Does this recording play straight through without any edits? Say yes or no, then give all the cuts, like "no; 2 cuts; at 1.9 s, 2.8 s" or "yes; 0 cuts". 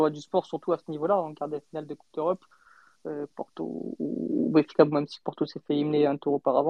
no; 1 cut; at 3.3 s